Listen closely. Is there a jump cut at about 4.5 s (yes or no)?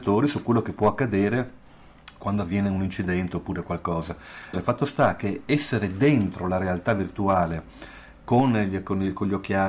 yes